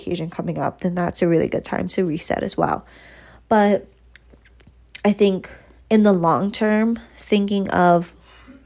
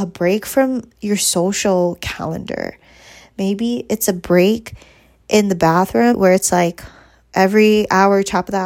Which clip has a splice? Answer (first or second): second